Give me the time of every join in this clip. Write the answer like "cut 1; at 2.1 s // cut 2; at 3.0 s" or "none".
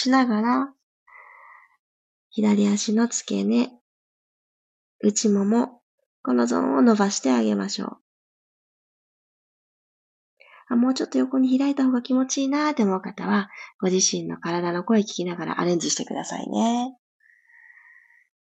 none